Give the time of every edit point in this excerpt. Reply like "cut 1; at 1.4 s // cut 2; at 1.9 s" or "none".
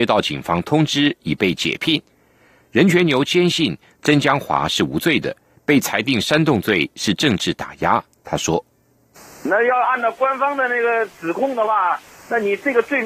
none